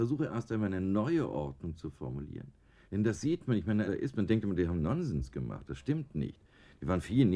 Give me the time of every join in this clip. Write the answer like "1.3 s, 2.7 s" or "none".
2.8 s, 3.9 s